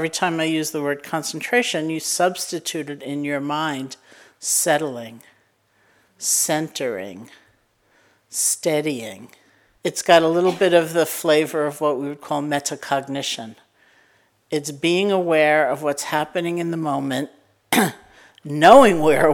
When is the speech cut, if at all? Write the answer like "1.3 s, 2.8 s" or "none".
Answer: 9.8 s